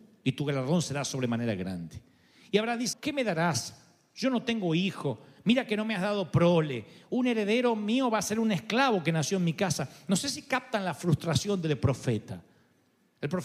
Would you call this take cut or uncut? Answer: cut